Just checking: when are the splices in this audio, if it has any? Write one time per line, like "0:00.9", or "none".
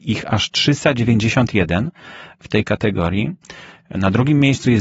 none

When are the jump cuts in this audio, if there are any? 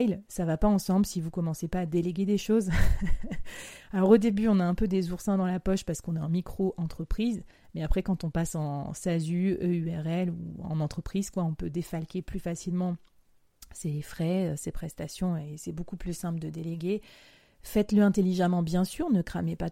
none

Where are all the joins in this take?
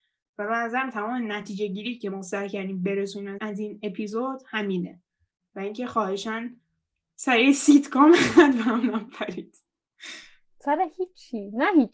0:03.4

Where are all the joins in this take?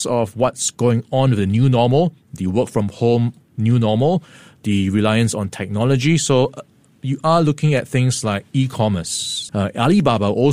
0:09.5

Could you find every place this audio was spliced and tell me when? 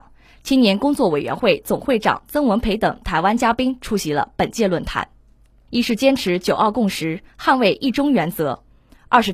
0:05.7

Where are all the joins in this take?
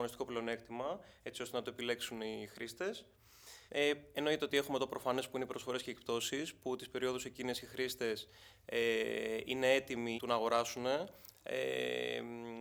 0:03.7
0:10.2
0:11.3

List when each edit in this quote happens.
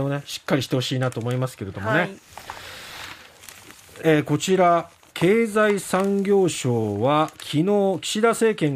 0:04.0

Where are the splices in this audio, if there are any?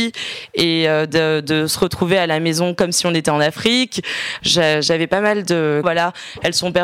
0:04.4
0:05.8

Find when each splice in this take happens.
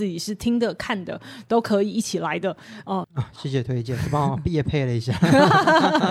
0:03.0

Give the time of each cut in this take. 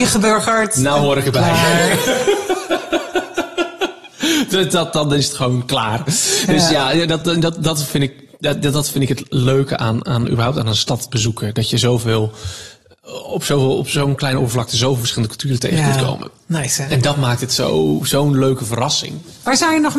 none

